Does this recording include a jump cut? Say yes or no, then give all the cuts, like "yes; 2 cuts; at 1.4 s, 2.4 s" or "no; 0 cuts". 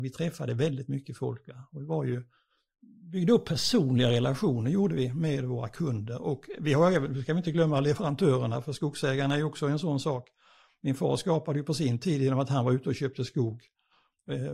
no; 0 cuts